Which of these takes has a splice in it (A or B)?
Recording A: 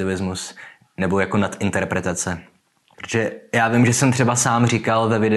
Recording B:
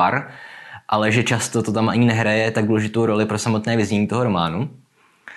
A